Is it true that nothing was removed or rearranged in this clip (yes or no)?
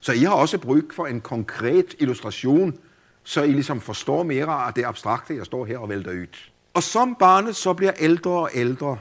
no